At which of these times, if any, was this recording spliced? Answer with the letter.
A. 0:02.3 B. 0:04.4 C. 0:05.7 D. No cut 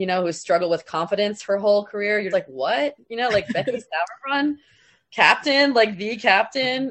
A